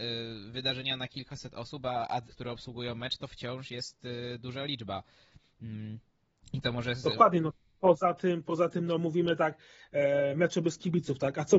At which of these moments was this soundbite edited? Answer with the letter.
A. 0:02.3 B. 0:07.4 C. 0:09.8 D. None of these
A